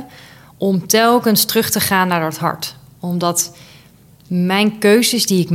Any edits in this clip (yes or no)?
no